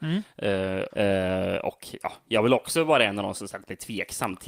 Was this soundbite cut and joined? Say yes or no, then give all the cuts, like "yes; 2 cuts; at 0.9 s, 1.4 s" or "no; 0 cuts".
yes; 1 cut; at 0.9 s